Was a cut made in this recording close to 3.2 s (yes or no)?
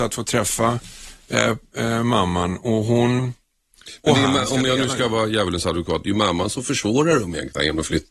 yes